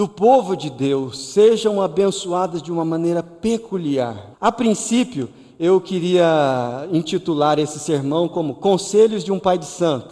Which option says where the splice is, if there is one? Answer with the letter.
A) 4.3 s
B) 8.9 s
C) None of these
A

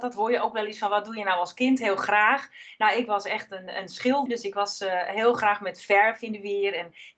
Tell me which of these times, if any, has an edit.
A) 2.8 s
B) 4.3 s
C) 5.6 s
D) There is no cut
B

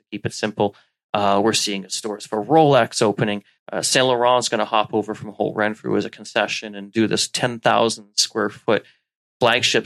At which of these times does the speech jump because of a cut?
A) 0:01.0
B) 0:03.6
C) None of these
B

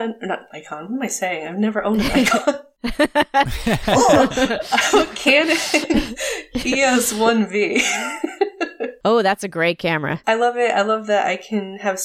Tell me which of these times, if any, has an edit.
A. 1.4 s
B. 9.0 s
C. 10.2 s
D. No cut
C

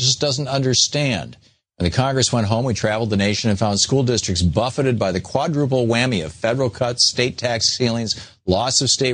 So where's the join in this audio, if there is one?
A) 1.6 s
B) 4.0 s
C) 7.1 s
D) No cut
D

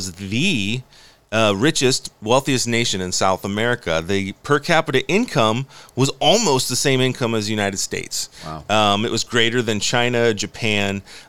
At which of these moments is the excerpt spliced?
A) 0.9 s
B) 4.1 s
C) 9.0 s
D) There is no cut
D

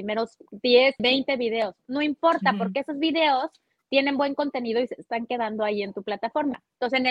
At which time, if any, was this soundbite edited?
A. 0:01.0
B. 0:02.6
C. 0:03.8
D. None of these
A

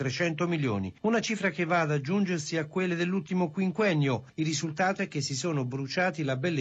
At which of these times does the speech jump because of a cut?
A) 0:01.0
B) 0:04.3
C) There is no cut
C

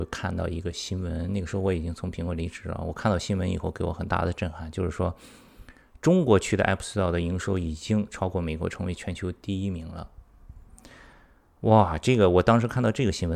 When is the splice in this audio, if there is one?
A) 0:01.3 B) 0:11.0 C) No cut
C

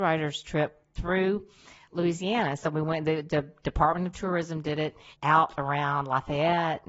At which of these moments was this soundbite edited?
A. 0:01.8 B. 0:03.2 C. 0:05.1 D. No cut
C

